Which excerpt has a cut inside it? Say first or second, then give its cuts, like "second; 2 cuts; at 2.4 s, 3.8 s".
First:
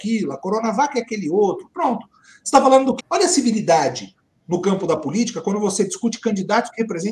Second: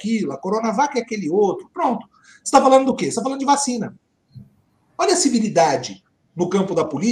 first; 1 cut; at 3.0 s